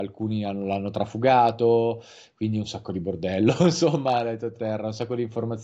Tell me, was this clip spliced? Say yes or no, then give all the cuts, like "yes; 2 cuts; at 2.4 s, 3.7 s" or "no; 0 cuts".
yes; 1 cut; at 4.5 s